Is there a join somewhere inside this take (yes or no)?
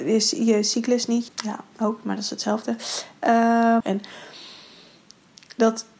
yes